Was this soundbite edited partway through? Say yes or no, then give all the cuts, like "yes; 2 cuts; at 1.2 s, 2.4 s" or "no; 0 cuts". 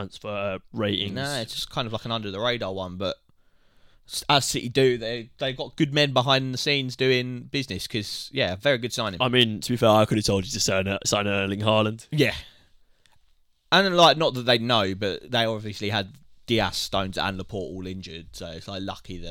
no; 0 cuts